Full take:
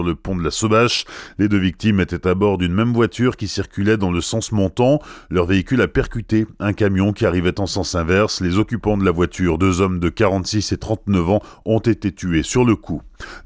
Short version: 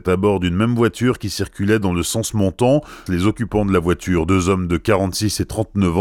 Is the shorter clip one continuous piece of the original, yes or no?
no